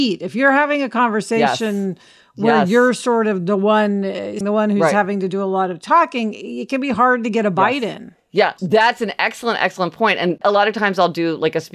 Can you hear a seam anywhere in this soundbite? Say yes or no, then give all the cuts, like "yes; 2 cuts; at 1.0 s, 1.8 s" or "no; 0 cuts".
yes; 2 cuts; at 4.4 s, 8.6 s